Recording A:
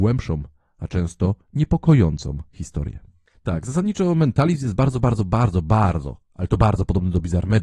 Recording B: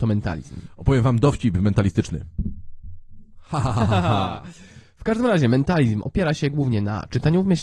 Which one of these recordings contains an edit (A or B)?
A